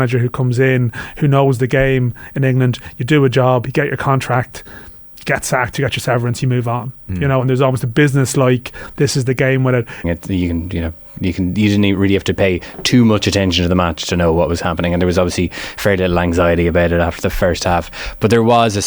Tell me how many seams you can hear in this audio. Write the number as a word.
one